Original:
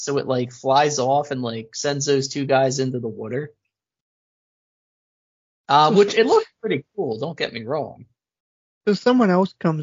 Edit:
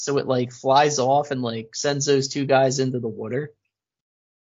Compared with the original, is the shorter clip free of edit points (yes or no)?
yes